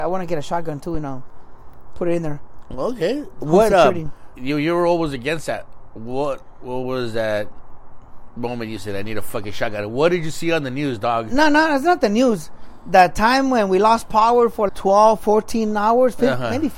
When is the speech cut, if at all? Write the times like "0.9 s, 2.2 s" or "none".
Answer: 4.3 s, 14.7 s

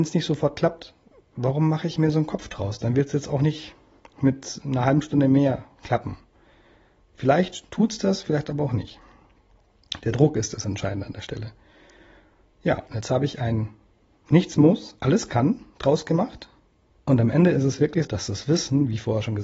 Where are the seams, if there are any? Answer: 16.9 s, 18.0 s

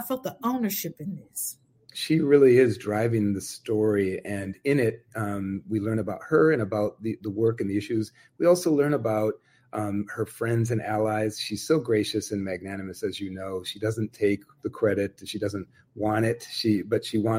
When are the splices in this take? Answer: 1.9 s

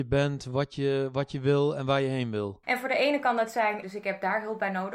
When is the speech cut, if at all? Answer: 2.6 s, 3.8 s

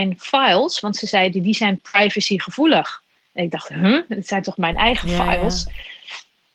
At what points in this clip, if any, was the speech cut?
none

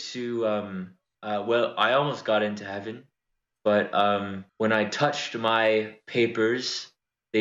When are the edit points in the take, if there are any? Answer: none

